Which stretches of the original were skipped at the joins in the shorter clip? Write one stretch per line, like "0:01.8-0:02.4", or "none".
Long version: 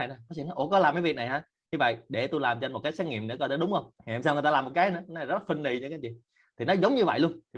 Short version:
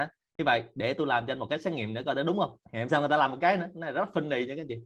none